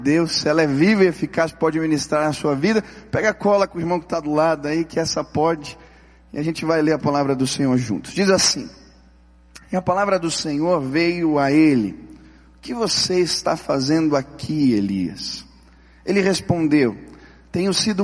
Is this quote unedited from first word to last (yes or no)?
yes